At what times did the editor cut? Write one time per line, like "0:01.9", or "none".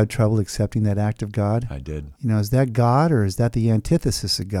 0:02.1